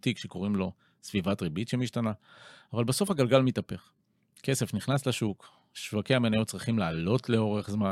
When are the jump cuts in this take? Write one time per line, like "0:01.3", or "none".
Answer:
none

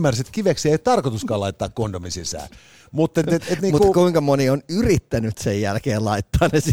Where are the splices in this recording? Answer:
none

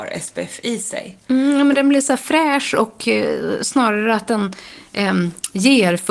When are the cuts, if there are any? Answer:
none

